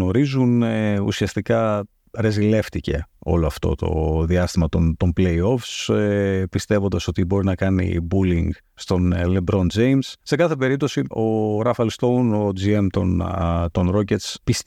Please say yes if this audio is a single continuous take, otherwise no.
no